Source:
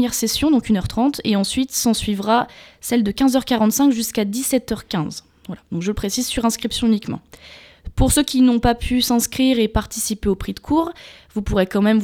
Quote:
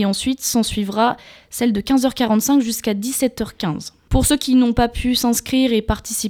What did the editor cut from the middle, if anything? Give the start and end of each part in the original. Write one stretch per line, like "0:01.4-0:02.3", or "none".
0:05.4-0:07.9

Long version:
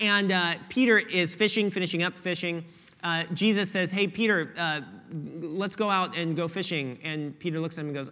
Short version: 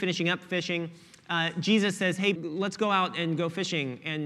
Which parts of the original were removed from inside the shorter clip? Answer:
0:04.1-0:05.3

